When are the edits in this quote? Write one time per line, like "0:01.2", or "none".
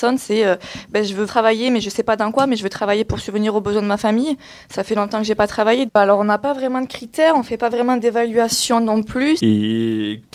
0:01.3
0:05.9
0:09.4